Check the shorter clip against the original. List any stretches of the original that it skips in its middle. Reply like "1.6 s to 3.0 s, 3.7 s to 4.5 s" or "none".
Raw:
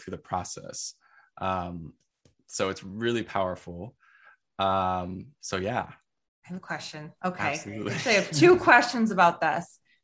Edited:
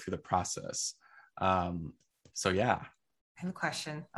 2.3 s to 5.4 s